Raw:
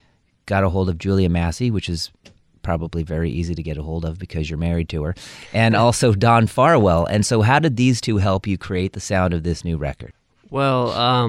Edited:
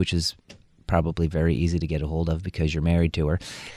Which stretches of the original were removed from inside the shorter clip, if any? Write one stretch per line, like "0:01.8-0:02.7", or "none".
none